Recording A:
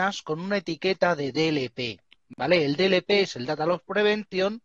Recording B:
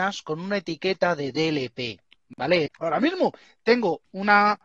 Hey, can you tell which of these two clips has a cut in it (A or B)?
B